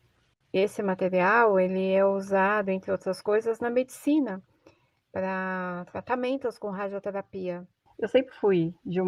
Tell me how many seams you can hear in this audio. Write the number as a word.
two